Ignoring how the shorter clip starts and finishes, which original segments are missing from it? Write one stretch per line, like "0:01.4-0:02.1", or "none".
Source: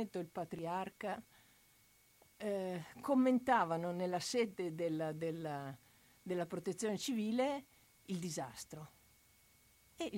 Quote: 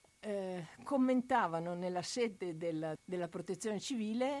0:05.1-0:06.1